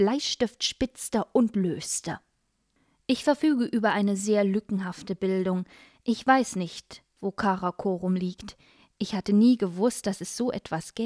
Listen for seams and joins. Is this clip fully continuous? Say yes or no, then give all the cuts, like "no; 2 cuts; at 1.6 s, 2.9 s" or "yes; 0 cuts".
no; 1 cut; at 8.9 s